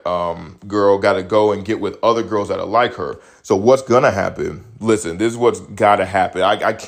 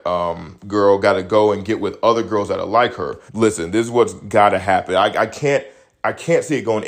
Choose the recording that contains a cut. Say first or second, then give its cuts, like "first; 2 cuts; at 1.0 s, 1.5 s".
second; 1 cut; at 3.3 s